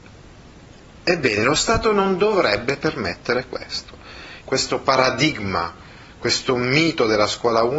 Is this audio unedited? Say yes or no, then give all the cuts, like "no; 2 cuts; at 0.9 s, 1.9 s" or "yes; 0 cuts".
no; 1 cut; at 4.4 s